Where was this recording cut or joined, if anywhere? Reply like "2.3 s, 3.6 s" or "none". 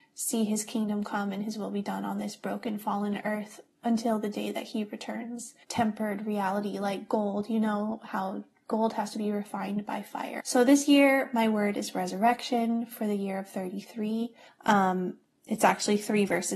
5.6 s, 10.4 s, 14.5 s

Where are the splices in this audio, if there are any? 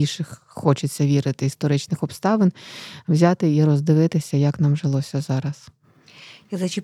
none

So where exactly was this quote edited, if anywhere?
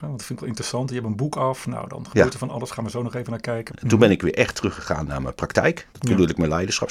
3.7 s, 5.9 s

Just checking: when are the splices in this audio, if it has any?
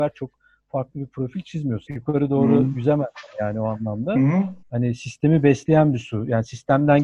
1.9 s, 4.6 s

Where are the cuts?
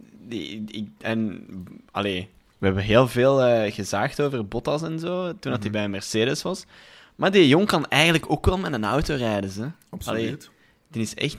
none

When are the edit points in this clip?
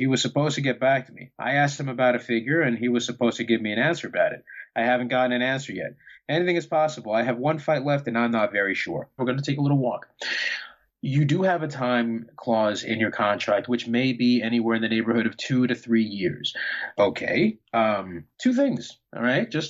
9.2 s, 16.9 s, 18.3 s

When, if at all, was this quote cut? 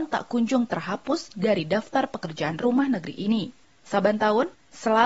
none

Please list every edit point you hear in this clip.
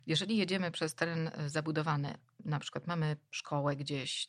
none

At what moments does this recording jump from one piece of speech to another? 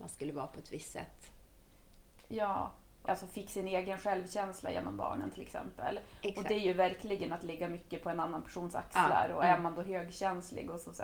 3.1 s

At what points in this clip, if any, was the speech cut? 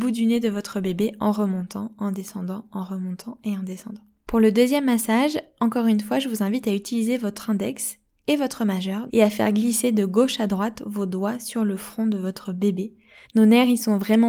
9.1 s, 13.2 s

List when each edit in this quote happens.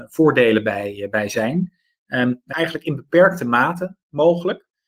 2.5 s

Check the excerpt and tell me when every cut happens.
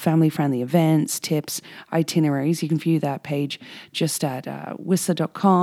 none

